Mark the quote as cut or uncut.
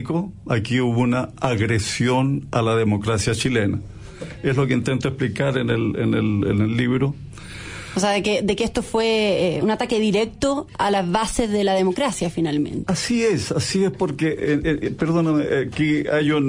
cut